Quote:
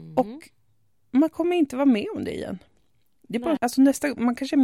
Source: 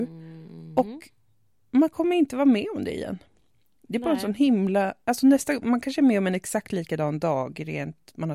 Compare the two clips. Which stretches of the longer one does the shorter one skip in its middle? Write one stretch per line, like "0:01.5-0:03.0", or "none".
0:04.2-0:05.0